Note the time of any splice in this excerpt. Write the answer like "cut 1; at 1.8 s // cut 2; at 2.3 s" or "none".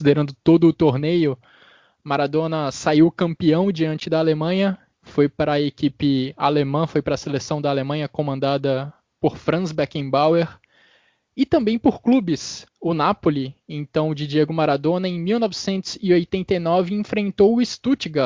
cut 1; at 5.0 s // cut 2; at 12.7 s